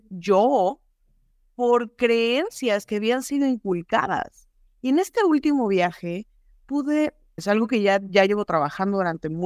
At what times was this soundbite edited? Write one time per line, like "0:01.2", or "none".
0:04.7
0:07.4